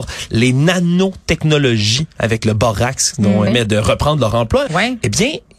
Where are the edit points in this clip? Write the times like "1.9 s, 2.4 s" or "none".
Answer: 3.5 s, 4.7 s